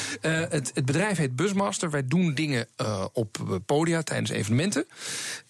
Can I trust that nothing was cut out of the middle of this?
yes; 0 cuts

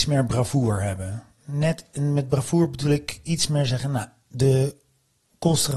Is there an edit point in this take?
no; 0 cuts

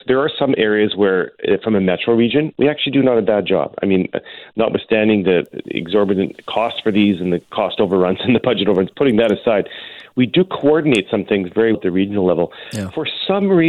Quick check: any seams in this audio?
yes; 2 cuts; at 8.9 s, 11.7 s

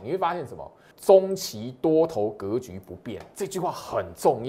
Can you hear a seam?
yes; 1 cut; at 0.9 s

